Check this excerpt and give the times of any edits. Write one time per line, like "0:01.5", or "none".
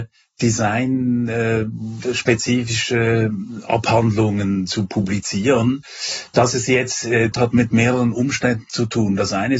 0:07.3